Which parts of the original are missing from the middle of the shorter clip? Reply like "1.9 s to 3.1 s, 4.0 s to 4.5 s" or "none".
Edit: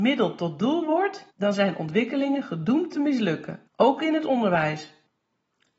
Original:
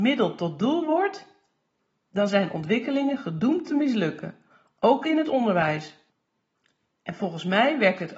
1.3 s to 2.0 s, 4.4 s to 4.7 s

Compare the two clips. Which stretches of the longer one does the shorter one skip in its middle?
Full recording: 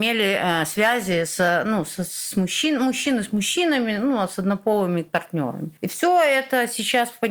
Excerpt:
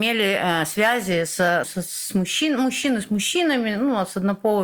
1.6 s to 1.9 s

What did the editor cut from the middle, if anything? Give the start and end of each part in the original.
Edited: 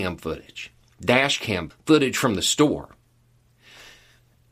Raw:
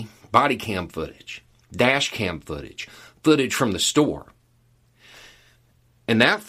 2.4 s to 3.1 s

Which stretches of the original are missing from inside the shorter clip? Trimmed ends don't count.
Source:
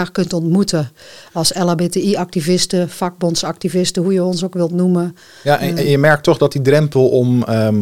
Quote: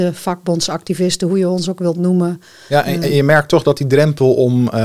none

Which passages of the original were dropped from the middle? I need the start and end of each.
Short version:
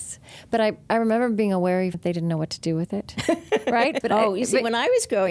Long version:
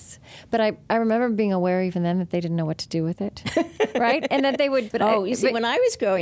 1.9 s to 2.2 s, 4.3 s to 4.9 s

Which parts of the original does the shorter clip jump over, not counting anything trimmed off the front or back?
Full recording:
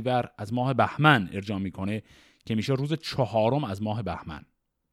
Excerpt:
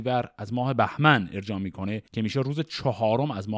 2.1 s to 2.4 s

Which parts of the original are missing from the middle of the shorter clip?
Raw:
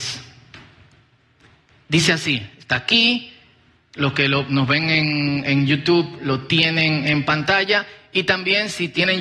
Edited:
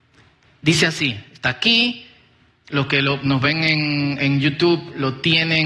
none

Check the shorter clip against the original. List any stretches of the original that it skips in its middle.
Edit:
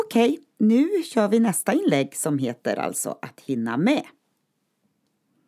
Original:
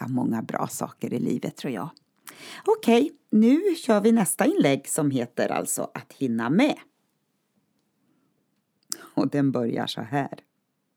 none

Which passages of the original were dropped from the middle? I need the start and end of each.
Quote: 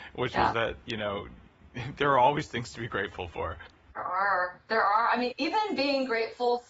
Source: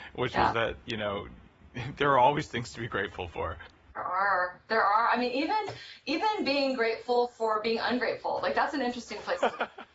5.3 s to 6.0 s

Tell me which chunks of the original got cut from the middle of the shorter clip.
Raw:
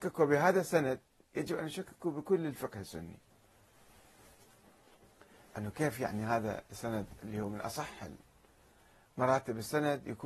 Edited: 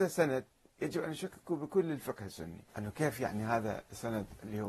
3.2 s to 5.5 s

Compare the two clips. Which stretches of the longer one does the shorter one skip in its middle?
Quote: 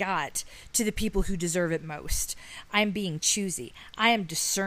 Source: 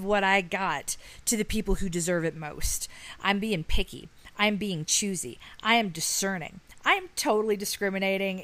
3.2 s to 4.3 s

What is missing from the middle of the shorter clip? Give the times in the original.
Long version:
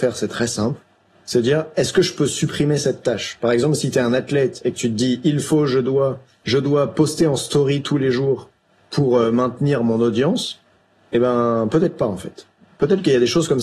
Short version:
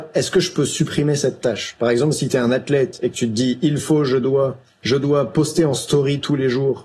none

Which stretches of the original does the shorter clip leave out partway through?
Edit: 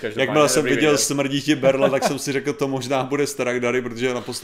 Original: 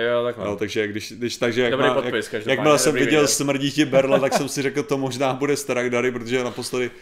none

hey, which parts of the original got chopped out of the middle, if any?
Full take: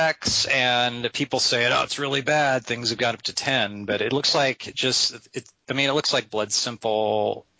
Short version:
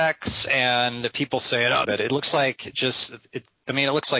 1.8 s to 3.9 s

